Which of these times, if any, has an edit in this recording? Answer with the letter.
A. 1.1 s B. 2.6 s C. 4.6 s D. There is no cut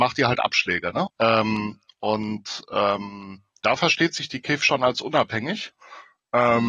A